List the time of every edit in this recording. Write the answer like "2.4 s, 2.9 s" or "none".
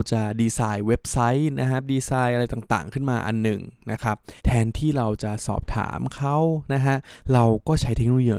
4.4 s